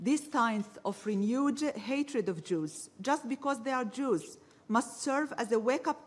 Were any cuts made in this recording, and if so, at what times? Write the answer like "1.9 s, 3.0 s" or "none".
none

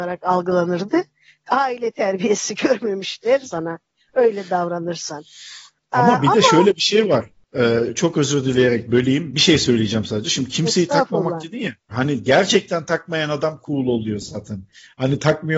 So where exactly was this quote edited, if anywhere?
3.4 s, 11.9 s

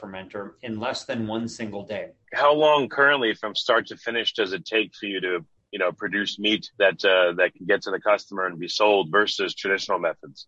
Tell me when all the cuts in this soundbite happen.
2.2 s, 6.7 s

